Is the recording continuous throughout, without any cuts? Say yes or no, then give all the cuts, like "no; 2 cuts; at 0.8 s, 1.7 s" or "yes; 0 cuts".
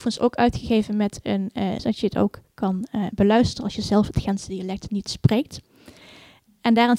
no; 1 cut; at 1.8 s